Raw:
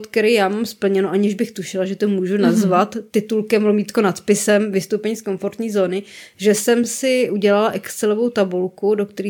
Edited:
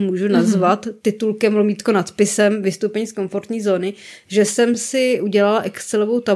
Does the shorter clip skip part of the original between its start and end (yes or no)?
no